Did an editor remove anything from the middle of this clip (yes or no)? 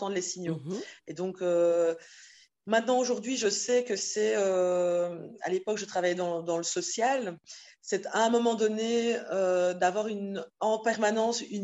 no